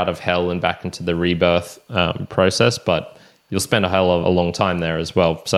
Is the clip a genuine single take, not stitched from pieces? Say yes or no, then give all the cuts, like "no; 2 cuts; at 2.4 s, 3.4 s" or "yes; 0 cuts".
no; 1 cut; at 4.2 s